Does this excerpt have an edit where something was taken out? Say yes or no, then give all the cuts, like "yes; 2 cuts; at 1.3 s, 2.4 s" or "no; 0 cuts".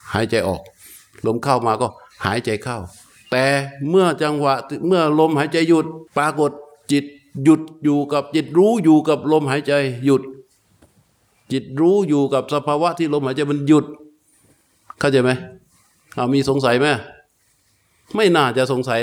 yes; 1 cut; at 6.1 s